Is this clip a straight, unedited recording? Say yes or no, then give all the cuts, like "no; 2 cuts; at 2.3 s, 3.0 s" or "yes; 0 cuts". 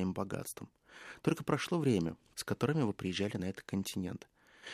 no; 1 cut; at 2.3 s